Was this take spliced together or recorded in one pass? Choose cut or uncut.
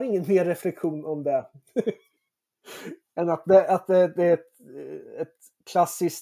uncut